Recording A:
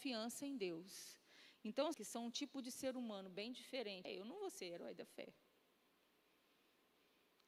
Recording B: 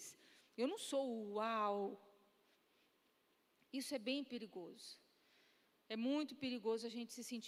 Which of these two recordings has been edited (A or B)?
A